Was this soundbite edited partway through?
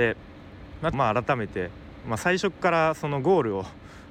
yes; 1 cut; at 0.9 s

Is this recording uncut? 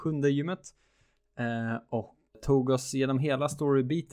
no; 1 cut; at 2.3 s

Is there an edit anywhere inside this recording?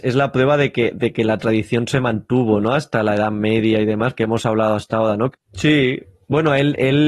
yes; 2 cuts; at 4.1 s, 5.3 s

